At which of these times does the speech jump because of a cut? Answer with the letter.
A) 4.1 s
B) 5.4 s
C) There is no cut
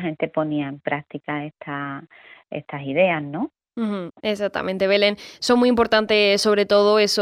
A